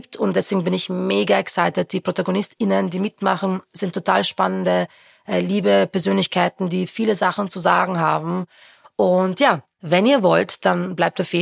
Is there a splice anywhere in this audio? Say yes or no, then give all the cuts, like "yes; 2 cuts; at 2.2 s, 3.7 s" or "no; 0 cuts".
no; 0 cuts